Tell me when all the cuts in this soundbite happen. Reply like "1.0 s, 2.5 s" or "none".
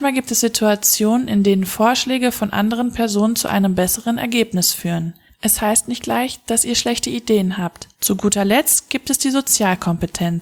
5.3 s, 7.9 s